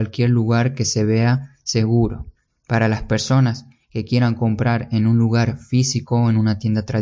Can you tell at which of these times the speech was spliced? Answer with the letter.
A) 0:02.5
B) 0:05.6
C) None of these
A